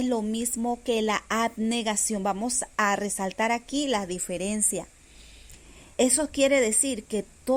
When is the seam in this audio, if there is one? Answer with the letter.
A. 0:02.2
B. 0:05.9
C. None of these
B